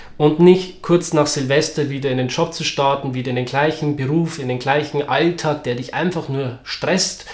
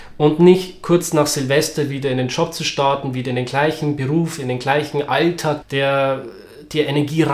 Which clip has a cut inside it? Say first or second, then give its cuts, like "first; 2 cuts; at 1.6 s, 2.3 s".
second; 1 cut; at 5.6 s